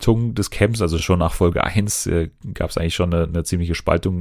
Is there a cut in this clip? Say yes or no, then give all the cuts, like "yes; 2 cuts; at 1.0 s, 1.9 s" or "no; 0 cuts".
no; 0 cuts